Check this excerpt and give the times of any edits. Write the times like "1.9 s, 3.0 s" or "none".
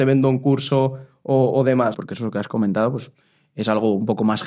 1.9 s